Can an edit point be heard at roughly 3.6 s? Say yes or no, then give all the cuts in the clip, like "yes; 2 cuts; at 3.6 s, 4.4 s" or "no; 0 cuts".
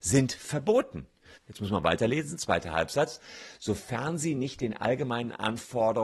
no; 1 cut; at 1.4 s